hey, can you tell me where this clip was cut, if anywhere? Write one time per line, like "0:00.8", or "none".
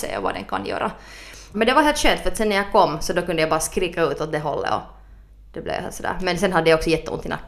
0:01.5